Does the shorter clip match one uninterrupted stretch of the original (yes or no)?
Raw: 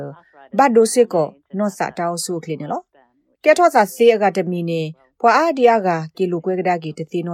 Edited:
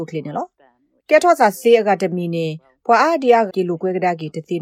no